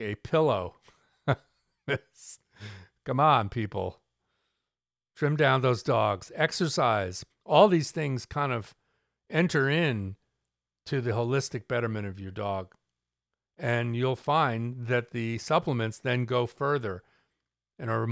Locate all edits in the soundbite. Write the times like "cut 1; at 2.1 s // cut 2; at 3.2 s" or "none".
cut 1; at 7.3 s